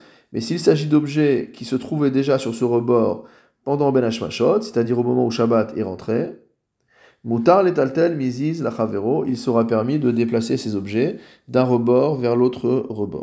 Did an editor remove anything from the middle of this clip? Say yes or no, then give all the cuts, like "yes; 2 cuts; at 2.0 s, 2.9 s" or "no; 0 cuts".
no; 0 cuts